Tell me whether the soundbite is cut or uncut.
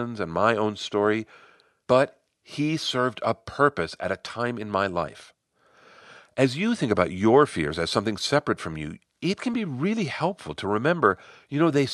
uncut